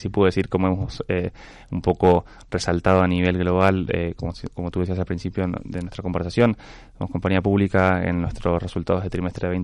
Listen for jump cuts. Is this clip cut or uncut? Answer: uncut